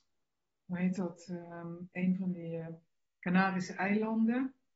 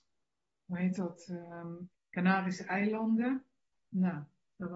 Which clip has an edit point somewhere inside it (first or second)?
second